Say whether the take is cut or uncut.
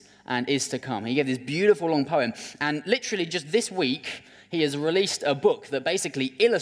uncut